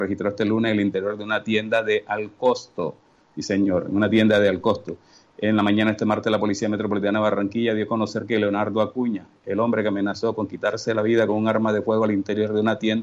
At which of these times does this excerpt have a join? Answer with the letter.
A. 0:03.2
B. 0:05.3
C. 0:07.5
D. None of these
D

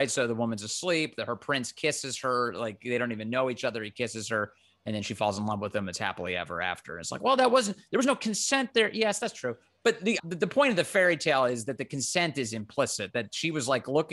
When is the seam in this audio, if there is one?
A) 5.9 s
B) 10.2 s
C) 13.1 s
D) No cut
B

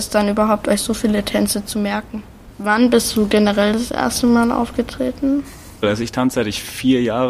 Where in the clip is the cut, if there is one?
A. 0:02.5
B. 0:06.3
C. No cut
A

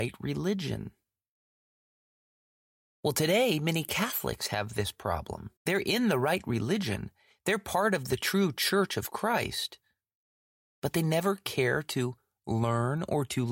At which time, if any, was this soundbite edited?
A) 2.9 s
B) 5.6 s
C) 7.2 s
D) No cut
B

